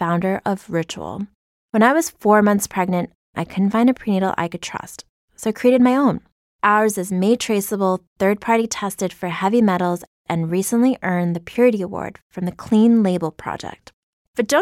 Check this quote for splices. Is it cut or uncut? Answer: uncut